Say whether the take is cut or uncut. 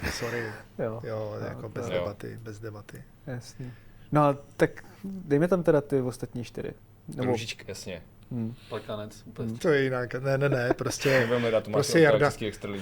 cut